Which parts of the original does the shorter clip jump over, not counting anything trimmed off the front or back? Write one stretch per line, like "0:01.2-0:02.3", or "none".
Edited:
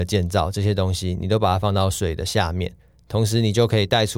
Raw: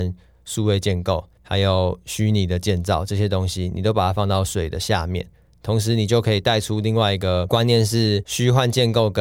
none